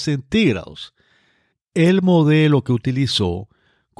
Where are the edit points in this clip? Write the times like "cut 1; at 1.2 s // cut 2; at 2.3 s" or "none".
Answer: cut 1; at 1.5 s